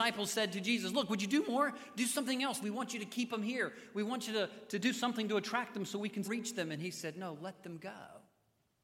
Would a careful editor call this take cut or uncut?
cut